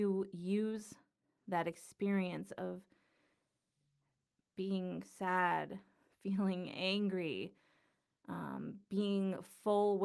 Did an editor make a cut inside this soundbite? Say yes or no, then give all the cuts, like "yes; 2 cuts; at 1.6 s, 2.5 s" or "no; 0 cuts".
no; 0 cuts